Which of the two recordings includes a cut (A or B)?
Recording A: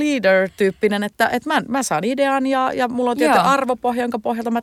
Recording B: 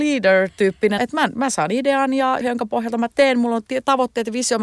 B